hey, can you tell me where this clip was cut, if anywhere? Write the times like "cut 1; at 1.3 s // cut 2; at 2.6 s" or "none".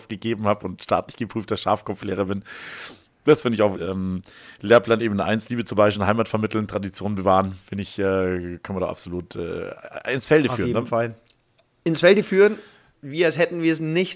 cut 1; at 3.7 s